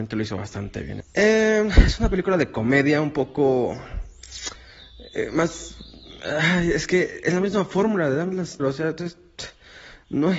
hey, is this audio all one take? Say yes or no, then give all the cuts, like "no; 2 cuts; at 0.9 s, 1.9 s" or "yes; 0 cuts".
no; 2 cuts; at 1.0 s, 8.6 s